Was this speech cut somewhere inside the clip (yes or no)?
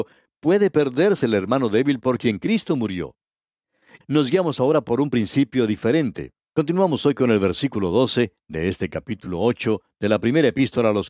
yes